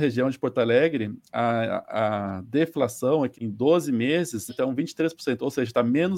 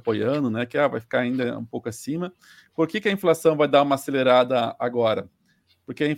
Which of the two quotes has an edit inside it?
first; 2 cuts; at 3.3 s, 4.5 s

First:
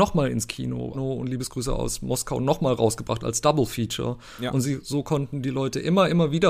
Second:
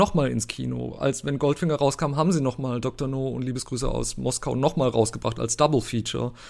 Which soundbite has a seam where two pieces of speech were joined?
first; 1 cut; at 0.9 s

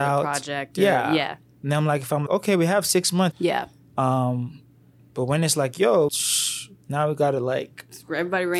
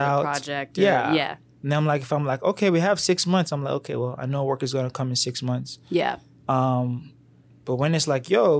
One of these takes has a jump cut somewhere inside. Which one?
first; 3 cuts; at 2.3 s, 3.3 s, 6.1 s

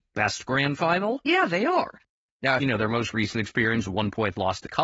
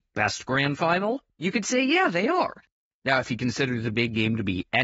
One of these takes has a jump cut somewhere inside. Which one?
first; 2 cuts; at 1.2 s, 2.6 s

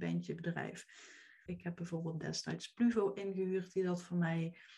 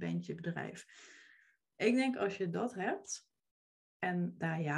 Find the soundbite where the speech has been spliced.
first; 1 cut; at 1.5 s

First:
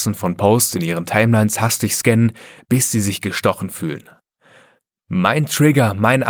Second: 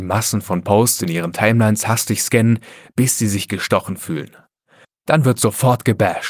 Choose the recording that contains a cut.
second; 1 cut; at 4.8 s

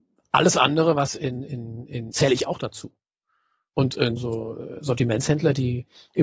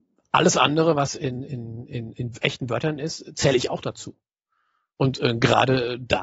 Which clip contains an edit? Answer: first; 2 cuts; at 2.1 s, 4.2 s

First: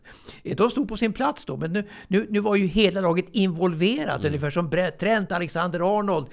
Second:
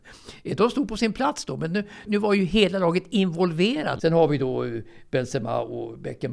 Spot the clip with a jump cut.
second; 2 cuts; at 2.1 s, 4.0 s

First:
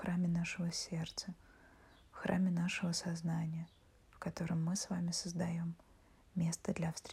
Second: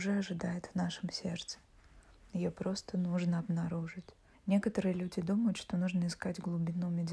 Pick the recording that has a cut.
second; 1 cut; at 4.3 s

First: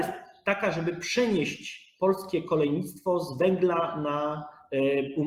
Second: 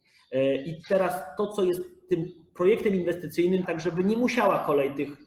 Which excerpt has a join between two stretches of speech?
second; 1 cut; at 3.6 s

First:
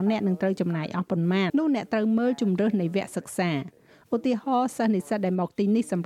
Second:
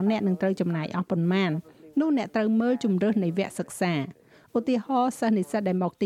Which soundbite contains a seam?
first; 1 cut; at 1.5 s

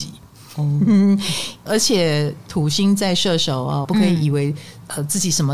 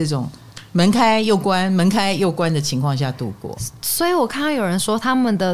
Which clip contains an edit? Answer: first; 2 cuts; at 1.7 s, 3.8 s

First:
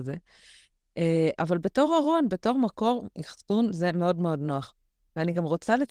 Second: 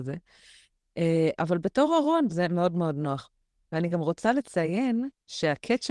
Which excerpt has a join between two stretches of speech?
second; 1 cut; at 2.3 s

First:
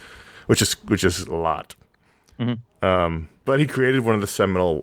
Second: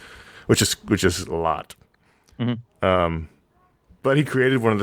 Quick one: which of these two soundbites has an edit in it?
first; 1 cut; at 3.4 s

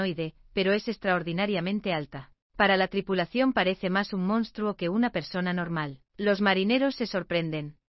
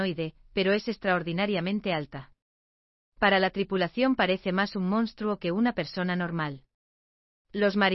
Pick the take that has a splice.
first; 2 cuts; at 2.4 s, 6.1 s

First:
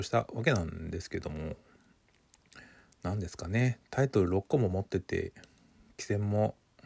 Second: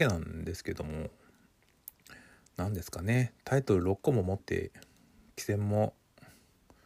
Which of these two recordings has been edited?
second; 1 cut; at 4.4 s

